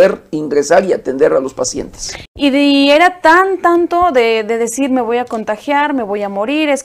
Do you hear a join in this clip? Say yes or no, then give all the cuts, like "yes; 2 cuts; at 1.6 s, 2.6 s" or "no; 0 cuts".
yes; 1 cut; at 2.3 s